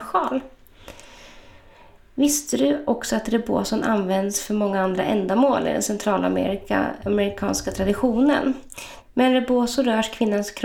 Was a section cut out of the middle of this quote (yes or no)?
yes